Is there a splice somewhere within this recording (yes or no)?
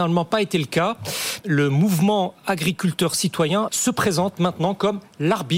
yes